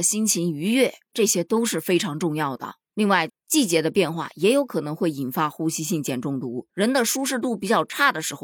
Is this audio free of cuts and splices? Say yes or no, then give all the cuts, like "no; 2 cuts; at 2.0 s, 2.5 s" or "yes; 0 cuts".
no; 2 cuts; at 3.3 s, 6.7 s